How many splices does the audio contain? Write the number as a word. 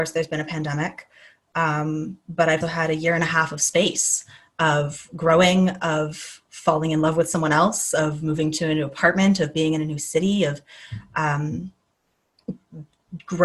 one